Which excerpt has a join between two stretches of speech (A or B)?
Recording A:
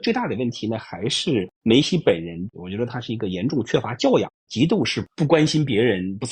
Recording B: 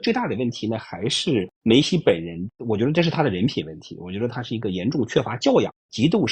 A